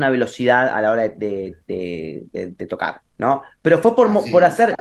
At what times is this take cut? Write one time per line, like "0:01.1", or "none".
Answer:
none

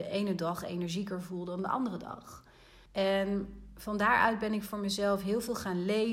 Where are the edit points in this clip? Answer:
0:02.9

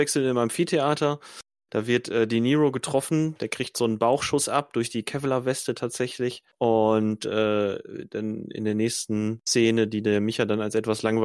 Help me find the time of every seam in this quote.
none

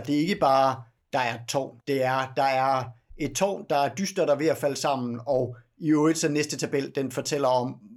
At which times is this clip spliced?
0:01.8

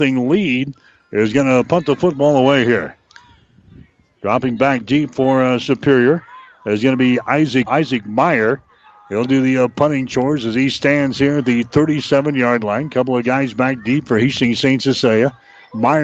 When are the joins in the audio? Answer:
0:07.7

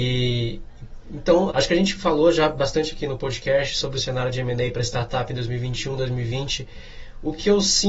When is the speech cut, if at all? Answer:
0:01.5

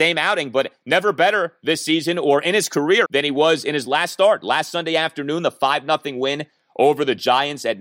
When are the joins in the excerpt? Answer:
0:03.0

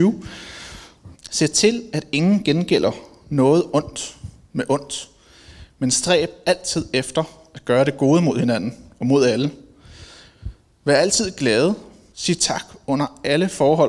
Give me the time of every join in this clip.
0:01.2
0:12.1

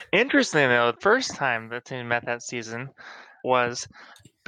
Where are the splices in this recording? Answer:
0:00.9

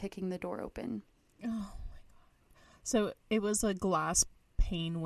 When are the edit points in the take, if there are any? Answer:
none

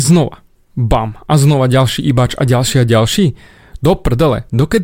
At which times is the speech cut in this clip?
none

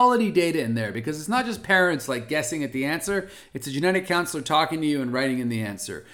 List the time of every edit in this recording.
none

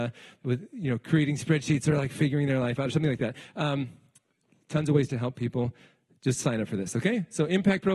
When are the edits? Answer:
none

